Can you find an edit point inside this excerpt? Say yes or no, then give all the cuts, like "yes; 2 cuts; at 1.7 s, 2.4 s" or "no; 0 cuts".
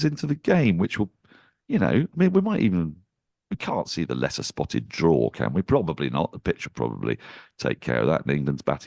no; 0 cuts